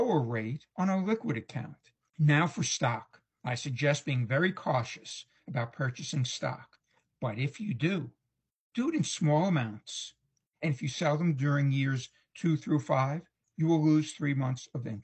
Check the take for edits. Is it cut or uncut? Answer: cut